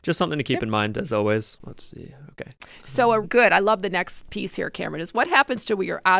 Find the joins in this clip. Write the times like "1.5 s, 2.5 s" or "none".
3.2 s